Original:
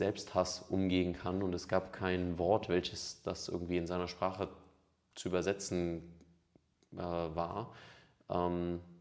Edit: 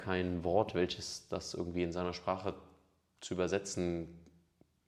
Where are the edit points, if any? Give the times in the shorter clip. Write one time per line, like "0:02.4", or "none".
none